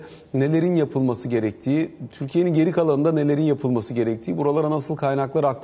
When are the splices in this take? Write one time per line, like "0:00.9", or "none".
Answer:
none